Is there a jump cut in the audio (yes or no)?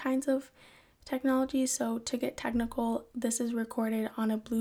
yes